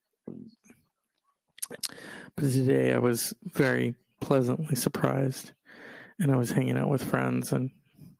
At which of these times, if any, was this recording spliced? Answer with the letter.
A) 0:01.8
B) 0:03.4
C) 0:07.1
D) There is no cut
A